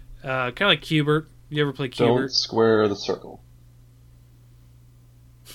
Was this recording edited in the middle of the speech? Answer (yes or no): no